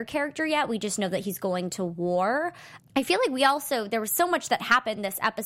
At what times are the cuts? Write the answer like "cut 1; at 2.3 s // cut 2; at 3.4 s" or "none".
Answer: cut 1; at 2.8 s